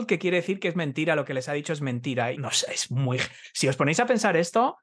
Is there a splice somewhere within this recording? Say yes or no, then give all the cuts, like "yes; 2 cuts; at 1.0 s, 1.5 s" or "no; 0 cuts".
yes; 1 cut; at 2.3 s